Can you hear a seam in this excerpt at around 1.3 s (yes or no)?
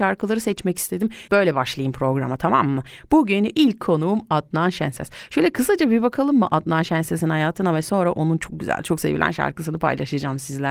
yes